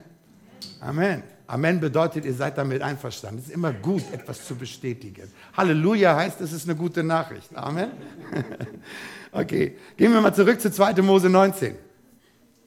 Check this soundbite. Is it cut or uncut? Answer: uncut